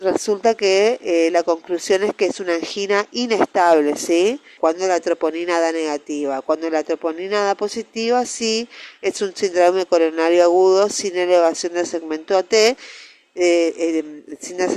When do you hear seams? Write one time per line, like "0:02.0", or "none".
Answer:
0:04.6

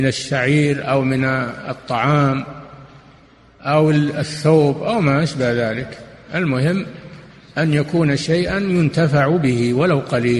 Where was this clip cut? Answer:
none

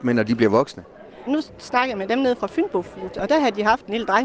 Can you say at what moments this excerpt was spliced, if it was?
0:01.3

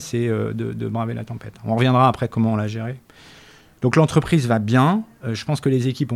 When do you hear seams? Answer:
none

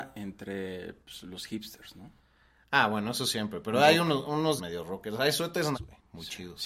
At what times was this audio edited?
0:04.6
0:05.7

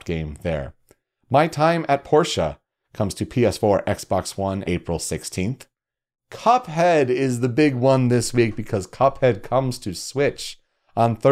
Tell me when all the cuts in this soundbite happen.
0:04.6

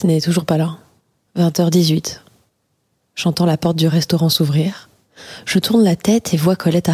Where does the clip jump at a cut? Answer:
0:01.3

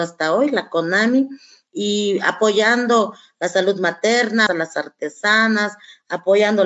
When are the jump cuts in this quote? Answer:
0:04.5

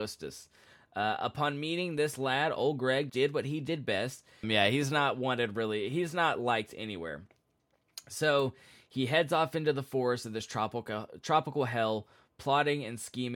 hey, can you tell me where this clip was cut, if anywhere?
0:03.1
0:04.4

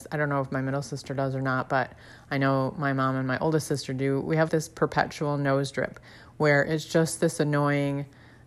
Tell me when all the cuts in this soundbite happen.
0:04.5

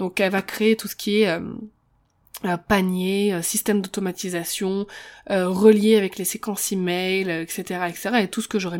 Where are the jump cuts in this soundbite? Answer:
none

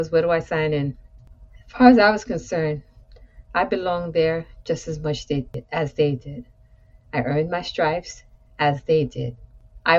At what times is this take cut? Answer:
none

